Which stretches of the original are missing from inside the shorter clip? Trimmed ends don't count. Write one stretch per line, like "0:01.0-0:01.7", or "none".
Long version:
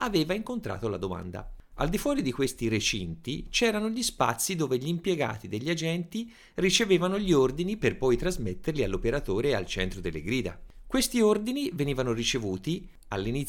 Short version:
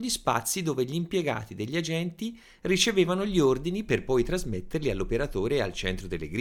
none

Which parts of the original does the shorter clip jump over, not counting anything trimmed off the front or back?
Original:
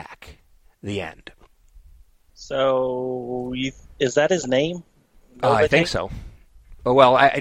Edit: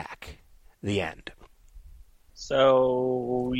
none

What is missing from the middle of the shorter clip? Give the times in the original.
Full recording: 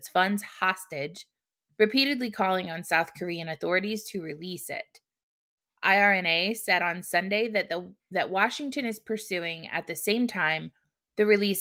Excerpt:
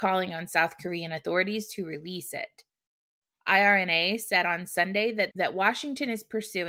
0:07.7-0:08.1

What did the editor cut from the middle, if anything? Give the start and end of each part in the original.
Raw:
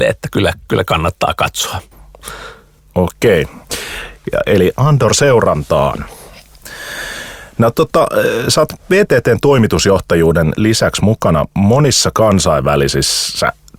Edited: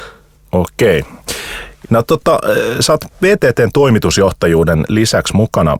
0:04.2-0:07.5

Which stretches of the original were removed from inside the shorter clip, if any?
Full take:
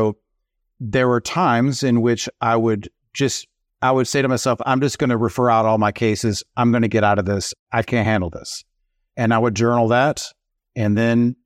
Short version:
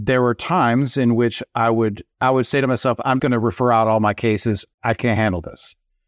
0:03.0-0:03.7
0:04.8-0:05.0
0:06.5-0:07.6

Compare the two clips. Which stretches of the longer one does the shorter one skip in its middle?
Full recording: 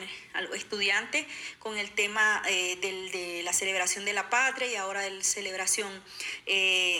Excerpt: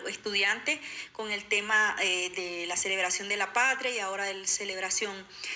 0:02.8-0:03.1

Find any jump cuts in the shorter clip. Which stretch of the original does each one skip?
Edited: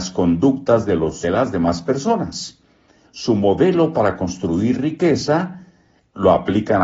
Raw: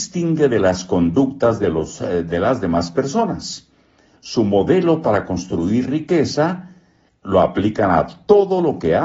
0:02.0-0:02.3

